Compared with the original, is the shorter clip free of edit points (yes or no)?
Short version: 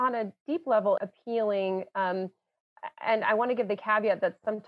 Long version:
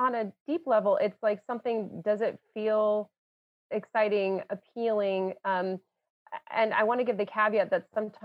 no